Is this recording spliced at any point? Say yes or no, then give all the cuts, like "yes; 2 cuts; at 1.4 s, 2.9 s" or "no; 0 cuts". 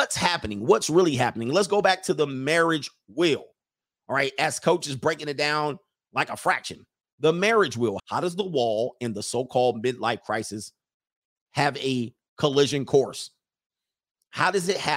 yes; 1 cut; at 8.0 s